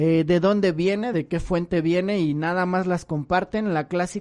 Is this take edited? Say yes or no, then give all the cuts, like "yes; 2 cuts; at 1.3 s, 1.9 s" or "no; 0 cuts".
no; 0 cuts